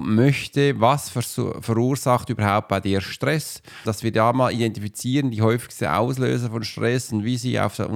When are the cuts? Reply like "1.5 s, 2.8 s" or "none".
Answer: 3.8 s